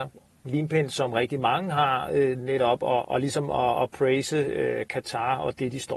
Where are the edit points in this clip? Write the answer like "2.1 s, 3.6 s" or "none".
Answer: 3.0 s